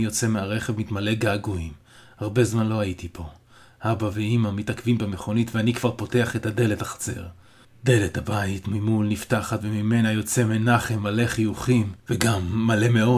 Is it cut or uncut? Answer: cut